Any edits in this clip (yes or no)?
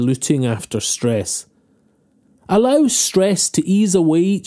yes